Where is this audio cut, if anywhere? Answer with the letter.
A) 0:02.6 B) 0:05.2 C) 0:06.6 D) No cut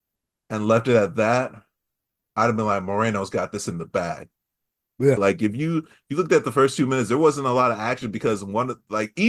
B